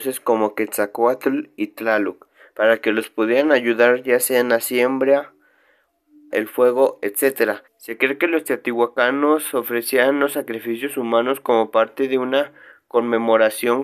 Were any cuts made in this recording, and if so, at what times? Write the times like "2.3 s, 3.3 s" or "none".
6.3 s, 7.7 s